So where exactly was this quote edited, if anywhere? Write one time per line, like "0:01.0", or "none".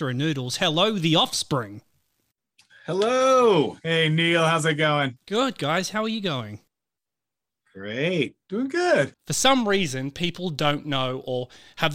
0:09.1